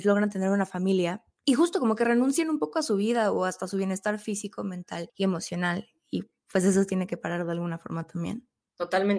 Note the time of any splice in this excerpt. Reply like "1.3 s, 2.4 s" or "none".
none

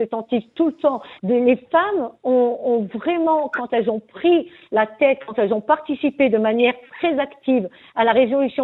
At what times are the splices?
1.2 s

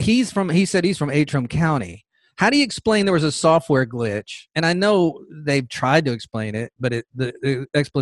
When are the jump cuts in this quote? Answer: none

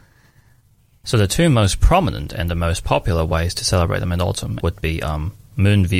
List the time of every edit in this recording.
1.0 s, 4.6 s

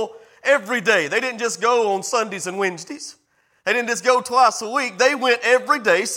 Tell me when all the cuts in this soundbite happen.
none

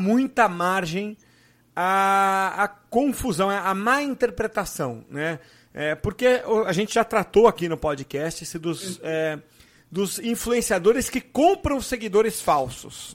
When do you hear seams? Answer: none

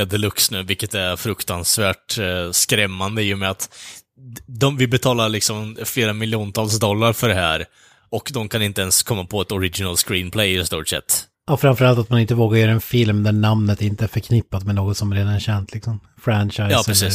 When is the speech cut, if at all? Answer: 11.3 s

